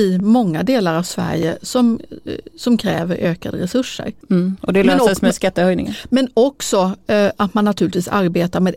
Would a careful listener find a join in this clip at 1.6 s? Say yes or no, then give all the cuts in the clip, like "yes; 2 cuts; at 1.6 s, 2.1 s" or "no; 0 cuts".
no; 0 cuts